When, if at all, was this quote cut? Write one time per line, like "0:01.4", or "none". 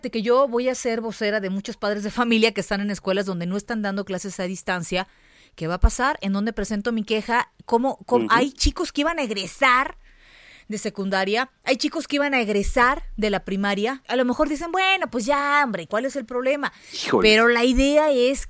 0:14.0
0:15.9